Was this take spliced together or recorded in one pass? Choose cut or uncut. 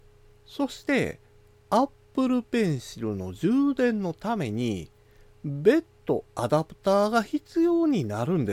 uncut